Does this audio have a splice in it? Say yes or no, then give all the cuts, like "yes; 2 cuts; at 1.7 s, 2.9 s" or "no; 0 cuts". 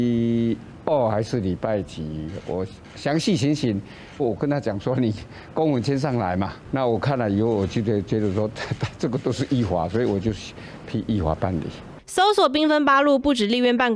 yes; 1 cut; at 4.2 s